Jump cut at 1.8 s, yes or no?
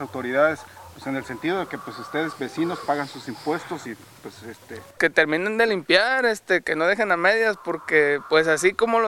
no